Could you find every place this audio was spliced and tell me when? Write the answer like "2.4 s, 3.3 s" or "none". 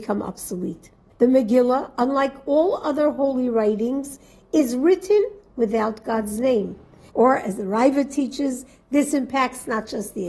1.1 s, 7.1 s